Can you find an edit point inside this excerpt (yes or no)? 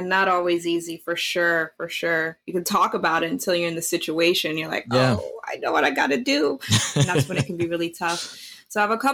no